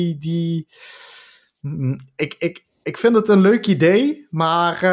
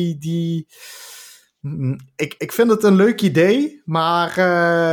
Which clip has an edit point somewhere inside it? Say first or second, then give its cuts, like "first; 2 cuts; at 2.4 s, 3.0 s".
second; 1 cut; at 2.4 s